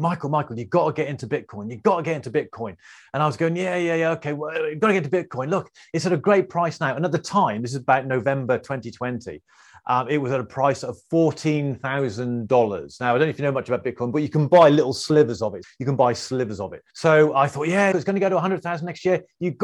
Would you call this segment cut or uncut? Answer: cut